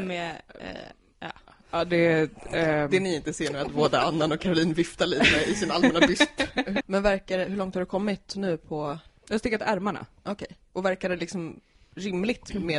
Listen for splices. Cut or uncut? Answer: cut